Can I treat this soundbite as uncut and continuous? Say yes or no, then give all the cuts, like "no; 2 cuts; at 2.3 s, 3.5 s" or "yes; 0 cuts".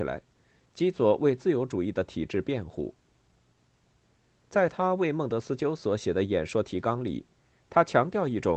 yes; 0 cuts